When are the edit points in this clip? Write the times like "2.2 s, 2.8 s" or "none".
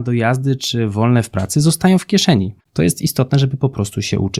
2.6 s